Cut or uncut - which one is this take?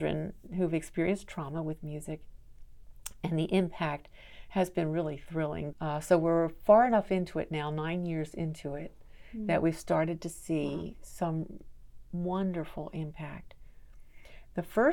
cut